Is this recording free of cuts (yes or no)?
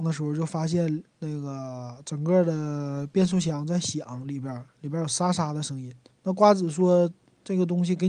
no